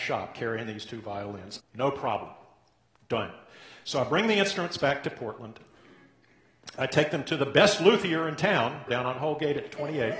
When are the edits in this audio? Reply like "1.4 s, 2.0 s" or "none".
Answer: 1.6 s, 8.9 s